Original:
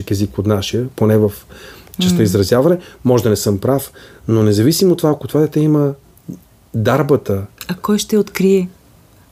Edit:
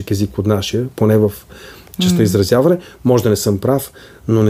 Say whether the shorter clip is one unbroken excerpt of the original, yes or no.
yes